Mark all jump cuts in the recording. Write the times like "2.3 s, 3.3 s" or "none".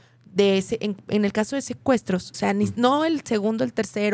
2.3 s